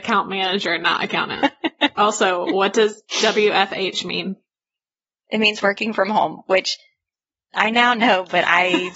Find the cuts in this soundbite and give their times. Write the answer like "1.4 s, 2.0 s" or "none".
1.9 s